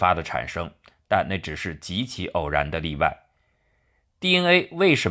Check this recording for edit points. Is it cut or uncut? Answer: uncut